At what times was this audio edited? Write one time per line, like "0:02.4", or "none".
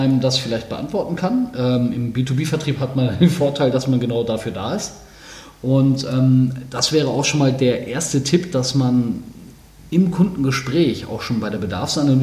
none